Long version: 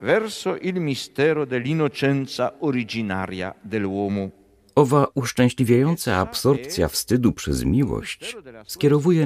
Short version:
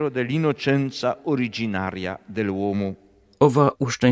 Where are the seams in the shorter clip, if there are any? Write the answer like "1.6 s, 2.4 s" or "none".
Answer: none